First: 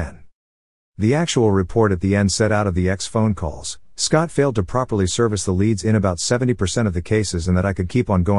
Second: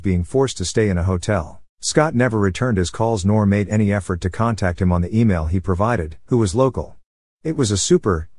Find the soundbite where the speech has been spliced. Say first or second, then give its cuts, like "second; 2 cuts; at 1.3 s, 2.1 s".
second; 2 cuts; at 1.7 s, 6.3 s